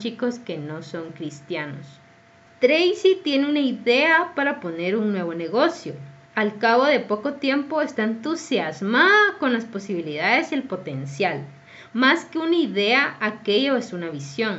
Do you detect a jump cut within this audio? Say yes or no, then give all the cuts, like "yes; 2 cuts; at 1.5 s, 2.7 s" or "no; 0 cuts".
yes; 1 cut; at 2.5 s